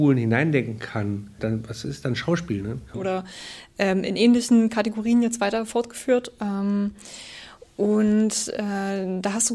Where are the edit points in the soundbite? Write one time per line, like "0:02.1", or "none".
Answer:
0:01.4
0:02.9